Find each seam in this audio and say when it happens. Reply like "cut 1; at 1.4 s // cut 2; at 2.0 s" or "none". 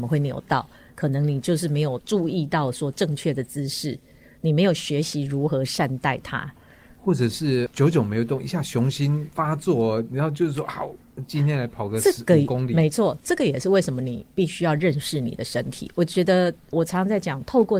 none

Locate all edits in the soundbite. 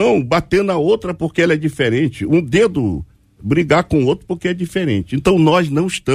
none

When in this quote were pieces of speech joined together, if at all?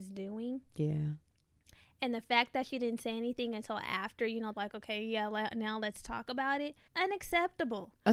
cut 1; at 4.5 s // cut 2; at 6.9 s

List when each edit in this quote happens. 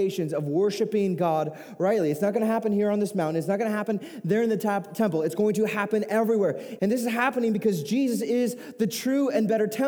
cut 1; at 6.8 s

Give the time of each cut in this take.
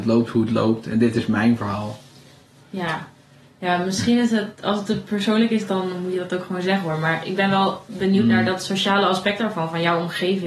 none

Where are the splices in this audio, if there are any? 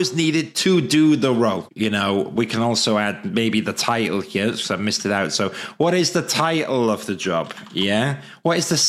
cut 1; at 1.7 s

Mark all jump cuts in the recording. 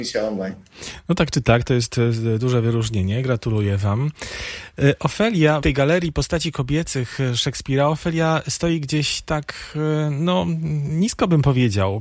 cut 1; at 5.6 s

